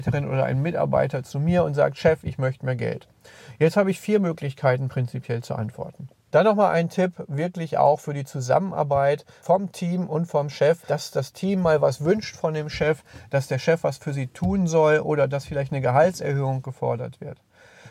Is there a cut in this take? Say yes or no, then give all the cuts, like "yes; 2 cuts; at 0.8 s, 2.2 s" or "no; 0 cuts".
yes; 2 cuts; at 6.3 s, 10.8 s